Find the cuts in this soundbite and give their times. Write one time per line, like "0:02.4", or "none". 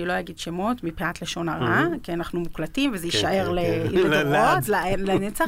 none